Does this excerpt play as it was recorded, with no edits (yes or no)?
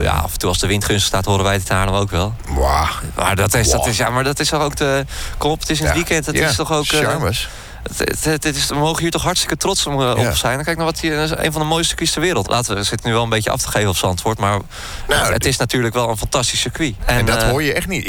no